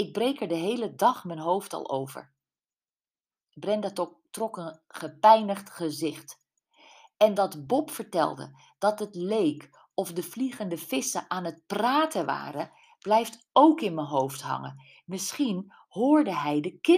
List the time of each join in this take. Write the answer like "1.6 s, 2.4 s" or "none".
none